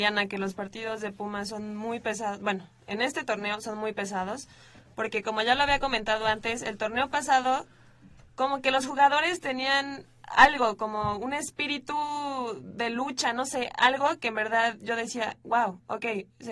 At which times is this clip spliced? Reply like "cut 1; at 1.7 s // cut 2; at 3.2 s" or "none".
none